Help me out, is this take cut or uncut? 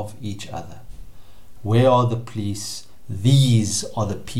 cut